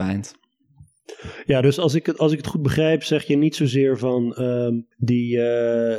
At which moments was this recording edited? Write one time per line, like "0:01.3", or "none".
0:04.9